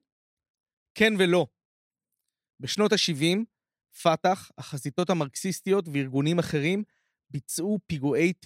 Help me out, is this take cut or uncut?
uncut